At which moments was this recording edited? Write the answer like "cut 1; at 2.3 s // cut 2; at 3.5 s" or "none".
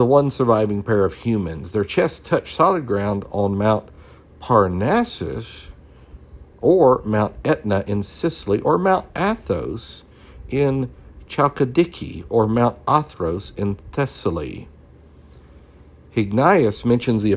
none